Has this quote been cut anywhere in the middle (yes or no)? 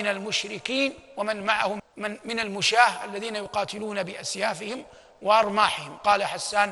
yes